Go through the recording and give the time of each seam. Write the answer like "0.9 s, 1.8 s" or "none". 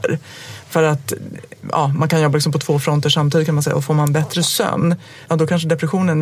5.3 s

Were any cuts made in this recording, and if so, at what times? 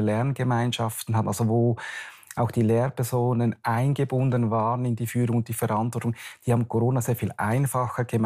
none

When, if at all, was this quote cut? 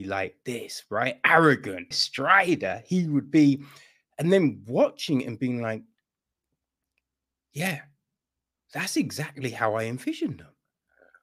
1.9 s

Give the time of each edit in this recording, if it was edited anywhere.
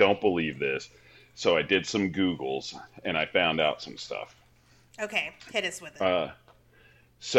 none

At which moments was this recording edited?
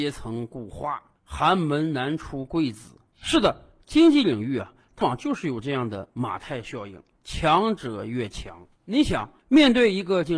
5.0 s

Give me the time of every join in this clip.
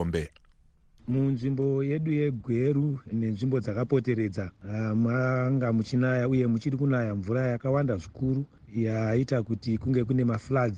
3.1 s

